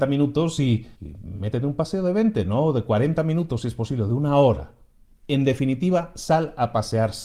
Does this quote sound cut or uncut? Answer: cut